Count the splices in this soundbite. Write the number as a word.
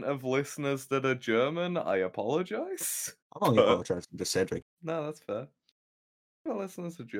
two